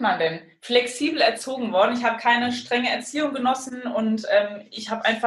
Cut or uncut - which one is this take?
uncut